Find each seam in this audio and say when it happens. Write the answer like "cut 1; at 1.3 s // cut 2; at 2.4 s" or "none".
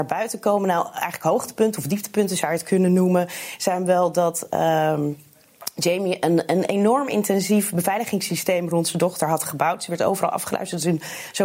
none